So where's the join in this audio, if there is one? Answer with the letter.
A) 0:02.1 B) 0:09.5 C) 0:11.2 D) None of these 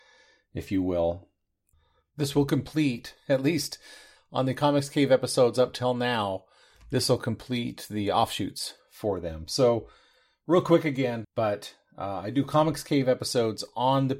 C